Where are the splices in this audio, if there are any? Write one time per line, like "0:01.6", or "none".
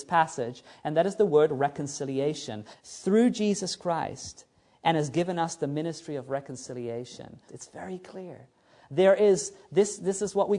0:02.7
0:07.5